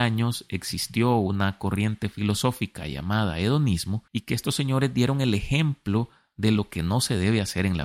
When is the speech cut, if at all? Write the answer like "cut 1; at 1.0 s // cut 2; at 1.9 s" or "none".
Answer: cut 1; at 4.1 s